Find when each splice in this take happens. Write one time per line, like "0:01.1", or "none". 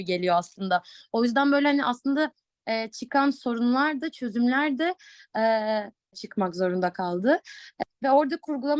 0:06.1
0:07.8

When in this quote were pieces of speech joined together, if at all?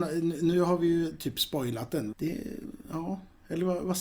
0:02.1

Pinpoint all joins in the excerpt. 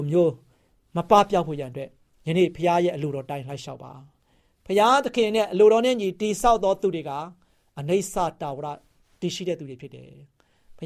none

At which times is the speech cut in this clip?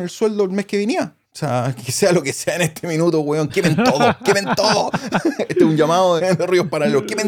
0:01.2
0:06.2

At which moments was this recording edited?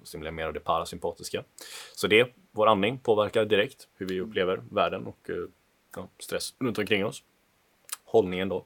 0:06.6

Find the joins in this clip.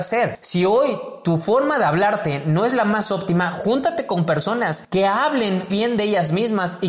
0:05.7

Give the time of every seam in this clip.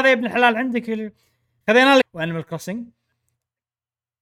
0:02.0

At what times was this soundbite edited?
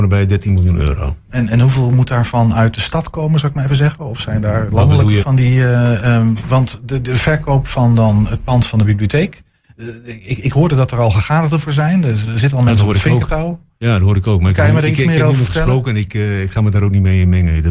0:05.2

